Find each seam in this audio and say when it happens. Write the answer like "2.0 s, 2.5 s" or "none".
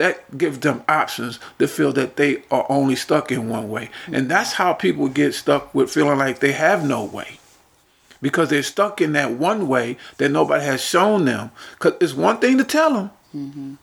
none